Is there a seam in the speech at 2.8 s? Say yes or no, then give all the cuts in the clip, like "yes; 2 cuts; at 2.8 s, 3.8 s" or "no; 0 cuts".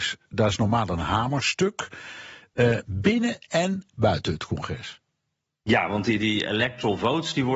yes; 1 cut; at 2.8 s